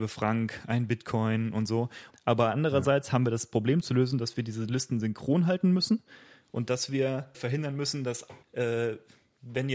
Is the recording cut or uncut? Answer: cut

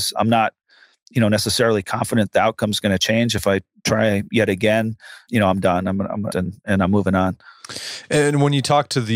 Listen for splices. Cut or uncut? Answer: cut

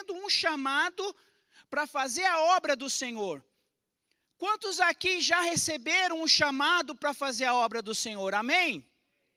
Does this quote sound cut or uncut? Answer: uncut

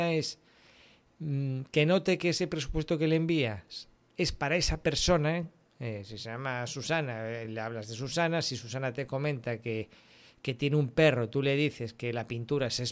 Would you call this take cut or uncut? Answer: uncut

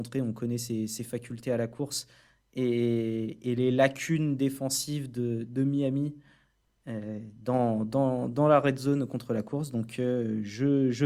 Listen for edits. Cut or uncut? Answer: uncut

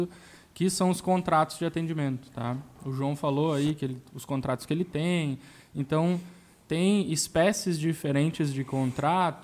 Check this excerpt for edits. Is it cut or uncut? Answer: uncut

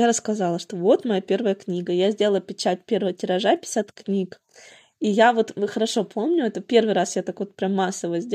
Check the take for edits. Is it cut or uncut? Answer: uncut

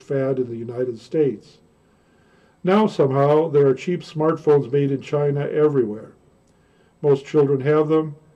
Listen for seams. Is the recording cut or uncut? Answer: uncut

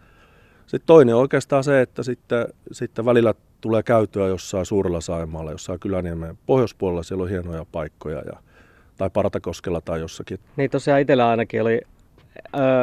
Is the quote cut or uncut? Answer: cut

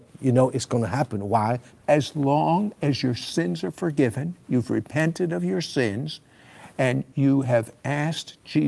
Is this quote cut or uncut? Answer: cut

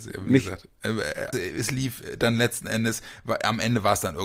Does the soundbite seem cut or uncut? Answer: cut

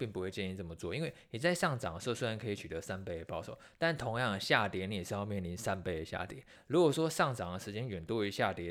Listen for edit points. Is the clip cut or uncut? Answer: cut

